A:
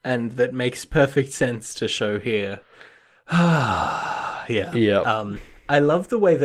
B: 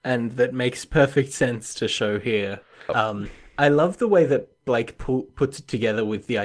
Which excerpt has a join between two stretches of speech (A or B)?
B